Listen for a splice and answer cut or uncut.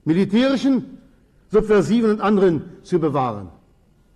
uncut